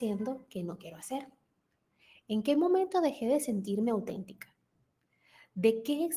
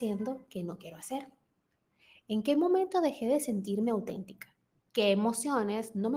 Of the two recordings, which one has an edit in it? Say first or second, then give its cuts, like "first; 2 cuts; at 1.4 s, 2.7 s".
second; 1 cut; at 4.8 s